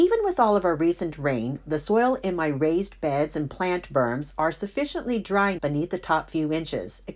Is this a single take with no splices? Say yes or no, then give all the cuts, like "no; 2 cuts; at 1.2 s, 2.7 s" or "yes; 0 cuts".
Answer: no; 1 cut; at 5.6 s